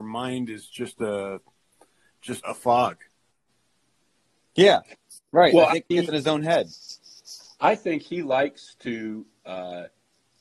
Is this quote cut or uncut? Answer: cut